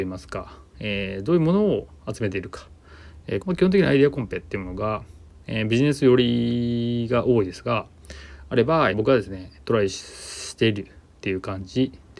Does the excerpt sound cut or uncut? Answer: cut